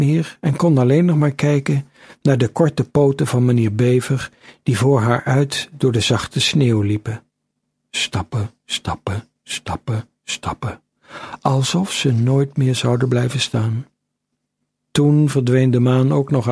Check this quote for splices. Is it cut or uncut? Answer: uncut